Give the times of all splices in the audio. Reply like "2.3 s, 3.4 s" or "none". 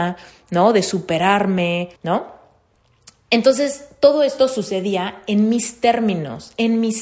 2.0 s